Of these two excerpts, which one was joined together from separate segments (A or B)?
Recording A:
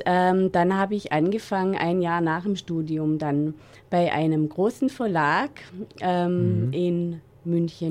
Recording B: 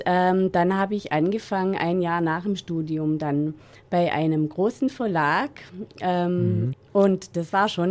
B